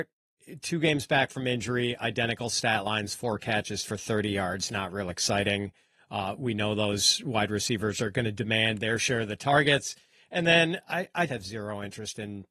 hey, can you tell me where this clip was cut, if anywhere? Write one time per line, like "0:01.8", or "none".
0:11.3